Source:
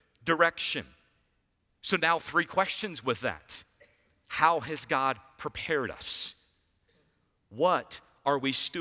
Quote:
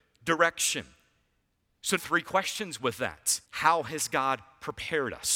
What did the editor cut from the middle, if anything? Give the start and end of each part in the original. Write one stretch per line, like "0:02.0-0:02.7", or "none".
0:02.0-0:02.2
0:03.7-0:04.2